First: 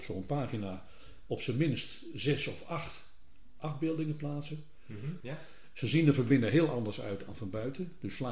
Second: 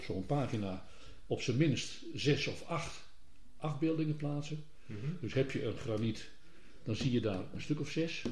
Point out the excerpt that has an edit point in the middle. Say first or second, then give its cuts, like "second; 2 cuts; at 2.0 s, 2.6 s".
first; 1 cut; at 5.2 s